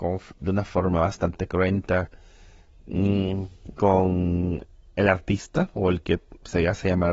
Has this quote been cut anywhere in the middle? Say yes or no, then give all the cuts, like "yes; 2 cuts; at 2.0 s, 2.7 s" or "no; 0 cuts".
no; 0 cuts